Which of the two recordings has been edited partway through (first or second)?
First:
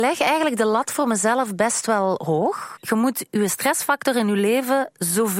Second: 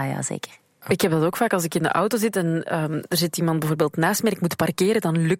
first